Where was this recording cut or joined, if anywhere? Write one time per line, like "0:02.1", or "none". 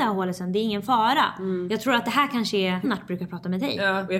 0:02.8